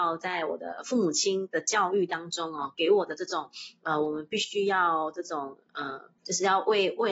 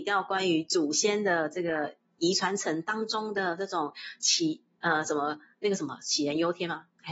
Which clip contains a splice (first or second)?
first